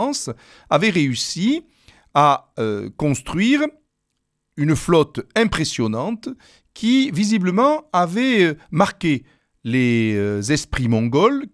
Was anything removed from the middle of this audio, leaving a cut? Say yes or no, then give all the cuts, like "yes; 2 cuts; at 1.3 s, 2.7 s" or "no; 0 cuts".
no; 0 cuts